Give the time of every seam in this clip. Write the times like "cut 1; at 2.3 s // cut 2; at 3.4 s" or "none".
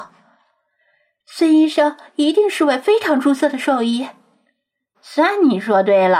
cut 1; at 4.9 s